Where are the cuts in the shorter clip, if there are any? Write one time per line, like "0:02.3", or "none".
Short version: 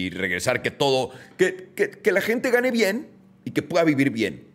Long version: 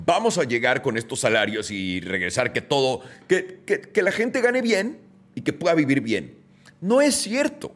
none